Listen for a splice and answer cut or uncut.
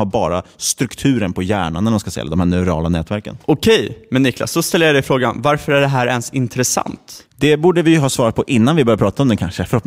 uncut